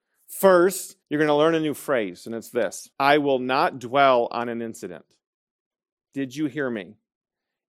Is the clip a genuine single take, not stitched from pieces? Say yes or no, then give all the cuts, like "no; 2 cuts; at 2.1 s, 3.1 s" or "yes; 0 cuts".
no; 2 cuts; at 1.0 s, 2.9 s